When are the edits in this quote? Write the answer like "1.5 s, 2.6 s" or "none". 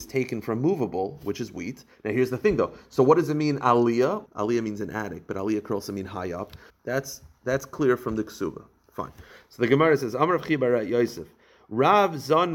4.3 s, 6.7 s